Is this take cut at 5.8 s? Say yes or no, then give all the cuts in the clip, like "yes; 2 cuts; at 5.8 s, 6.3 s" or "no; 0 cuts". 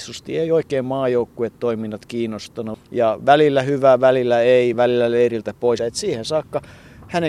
yes; 3 cuts; at 2.7 s, 4.7 s, 5.8 s